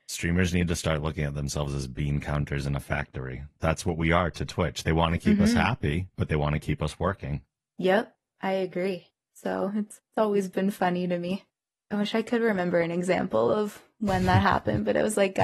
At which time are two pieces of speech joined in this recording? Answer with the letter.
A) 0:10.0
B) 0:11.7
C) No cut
A